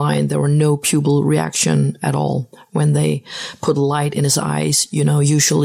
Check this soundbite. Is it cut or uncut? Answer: uncut